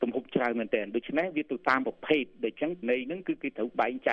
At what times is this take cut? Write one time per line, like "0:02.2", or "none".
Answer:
0:02.8